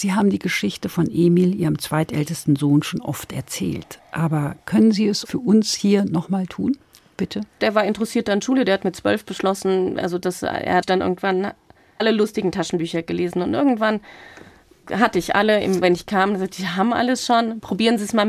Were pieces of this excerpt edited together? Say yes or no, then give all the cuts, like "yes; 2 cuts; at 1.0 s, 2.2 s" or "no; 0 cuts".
yes; 2 cuts; at 7.6 s, 15.8 s